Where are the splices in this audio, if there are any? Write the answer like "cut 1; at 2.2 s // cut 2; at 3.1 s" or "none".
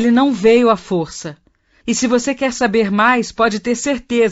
cut 1; at 1.8 s

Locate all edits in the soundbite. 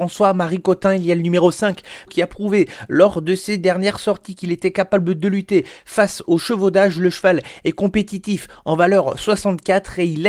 cut 1; at 2.1 s

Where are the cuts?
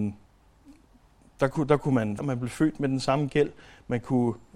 cut 1; at 2.2 s

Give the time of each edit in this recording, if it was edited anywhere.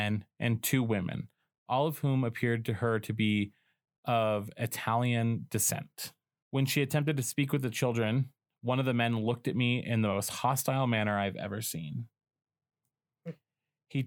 cut 1; at 6.4 s

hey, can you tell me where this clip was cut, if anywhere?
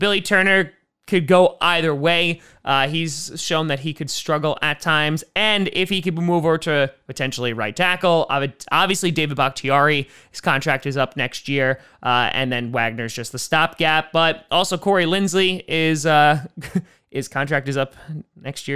none

